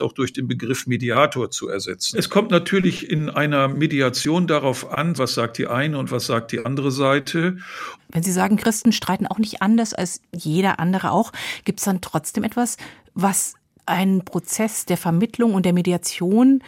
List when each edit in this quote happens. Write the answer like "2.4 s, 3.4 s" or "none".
2.1 s, 5.2 s, 8.0 s